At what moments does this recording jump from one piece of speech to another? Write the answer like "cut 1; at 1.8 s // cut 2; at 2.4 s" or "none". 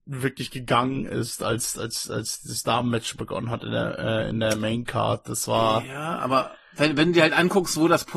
none